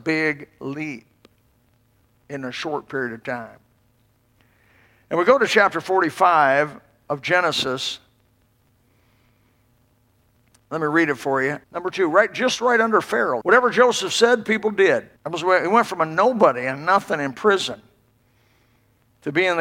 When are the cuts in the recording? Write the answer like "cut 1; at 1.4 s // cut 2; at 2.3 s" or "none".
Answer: cut 1; at 11.6 s // cut 2; at 13.4 s // cut 3; at 15.2 s